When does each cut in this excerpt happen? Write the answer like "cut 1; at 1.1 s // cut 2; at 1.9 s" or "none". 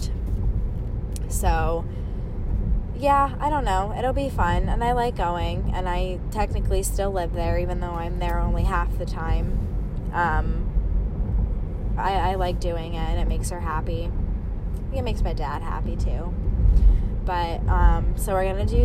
cut 1; at 12.0 s